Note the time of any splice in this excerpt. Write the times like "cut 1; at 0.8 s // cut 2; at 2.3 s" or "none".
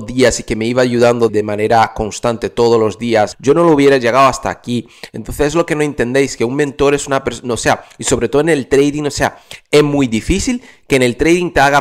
cut 1; at 1.3 s // cut 2; at 3.3 s